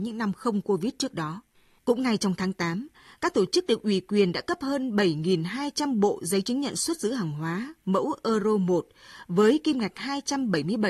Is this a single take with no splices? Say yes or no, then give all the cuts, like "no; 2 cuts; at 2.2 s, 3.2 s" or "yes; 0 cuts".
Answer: no; 1 cut; at 1.8 s